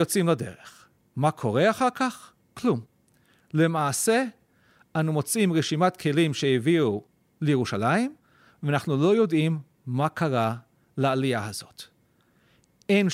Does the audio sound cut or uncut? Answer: uncut